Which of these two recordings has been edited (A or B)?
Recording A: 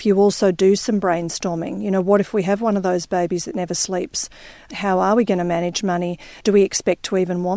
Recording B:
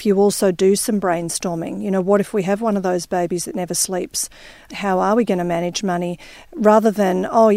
A